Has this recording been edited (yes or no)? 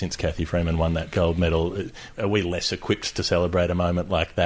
yes